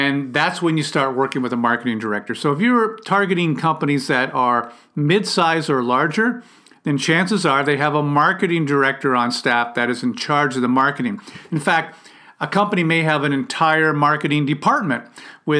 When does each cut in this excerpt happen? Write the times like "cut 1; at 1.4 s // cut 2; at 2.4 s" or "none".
none